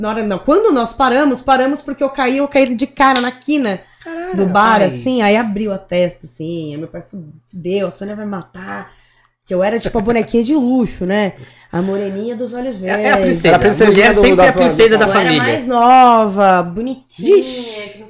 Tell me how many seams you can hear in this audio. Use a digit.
0